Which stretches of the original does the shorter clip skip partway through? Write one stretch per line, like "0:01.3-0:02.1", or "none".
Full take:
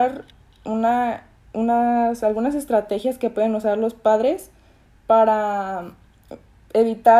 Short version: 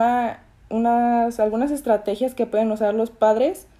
none